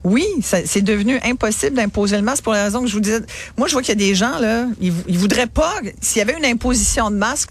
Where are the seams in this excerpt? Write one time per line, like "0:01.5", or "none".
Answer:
none